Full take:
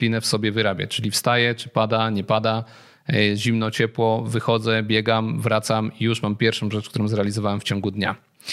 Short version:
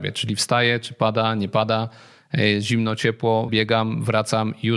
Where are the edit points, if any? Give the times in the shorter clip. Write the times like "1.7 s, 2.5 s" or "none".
3.5 s